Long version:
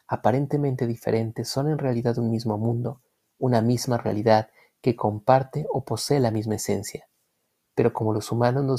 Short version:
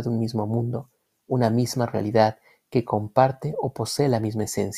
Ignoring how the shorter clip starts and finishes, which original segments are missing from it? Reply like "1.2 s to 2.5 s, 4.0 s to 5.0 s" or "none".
none